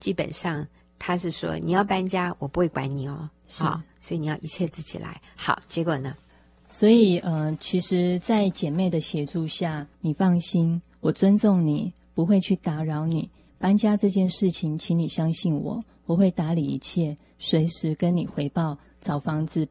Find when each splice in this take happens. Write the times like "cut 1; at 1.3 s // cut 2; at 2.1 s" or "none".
cut 1; at 9.9 s